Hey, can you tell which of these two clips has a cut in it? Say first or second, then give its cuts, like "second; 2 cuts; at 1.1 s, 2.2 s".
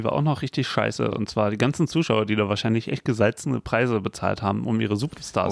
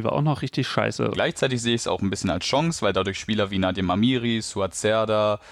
second; 1 cut; at 1.1 s